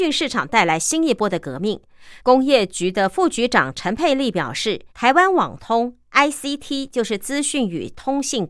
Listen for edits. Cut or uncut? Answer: cut